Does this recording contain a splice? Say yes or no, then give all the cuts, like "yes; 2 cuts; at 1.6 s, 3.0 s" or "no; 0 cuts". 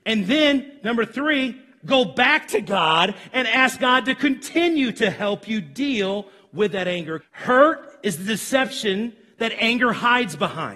yes; 1 cut; at 7.2 s